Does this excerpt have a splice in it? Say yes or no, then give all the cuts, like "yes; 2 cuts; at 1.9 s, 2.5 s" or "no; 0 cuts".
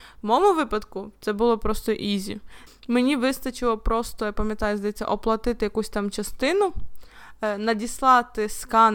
yes; 1 cut; at 2.7 s